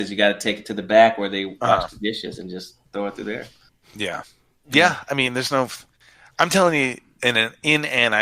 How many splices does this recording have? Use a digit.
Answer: 0